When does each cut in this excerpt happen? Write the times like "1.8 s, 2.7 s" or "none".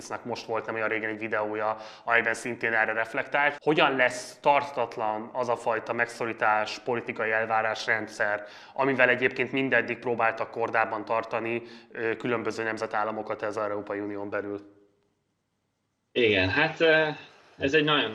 3.6 s